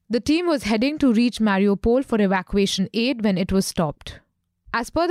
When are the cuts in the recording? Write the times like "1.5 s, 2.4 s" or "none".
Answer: none